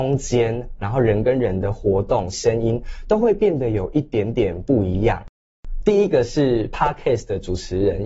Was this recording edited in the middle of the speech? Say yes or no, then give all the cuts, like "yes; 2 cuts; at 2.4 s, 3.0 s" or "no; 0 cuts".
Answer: yes; 2 cuts; at 2.3 s, 5.8 s